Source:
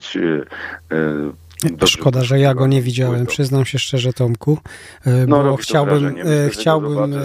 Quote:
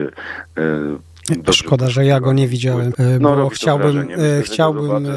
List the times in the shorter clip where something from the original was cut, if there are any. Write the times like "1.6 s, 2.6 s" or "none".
2.9 s